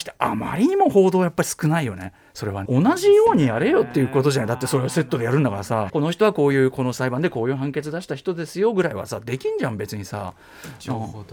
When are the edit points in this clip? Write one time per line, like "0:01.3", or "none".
0:02.7
0:05.9